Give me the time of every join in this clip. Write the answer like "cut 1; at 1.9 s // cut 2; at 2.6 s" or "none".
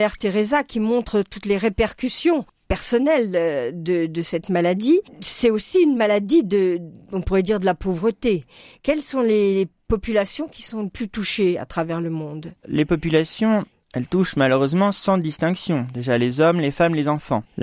cut 1; at 12.6 s